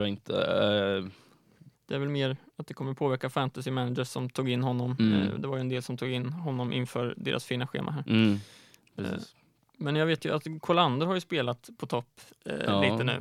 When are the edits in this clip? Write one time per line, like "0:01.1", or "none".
0:01.7